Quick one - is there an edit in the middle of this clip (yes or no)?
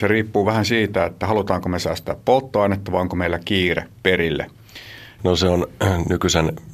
yes